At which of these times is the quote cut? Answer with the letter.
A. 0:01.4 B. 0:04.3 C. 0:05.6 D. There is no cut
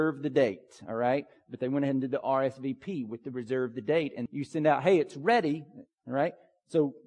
B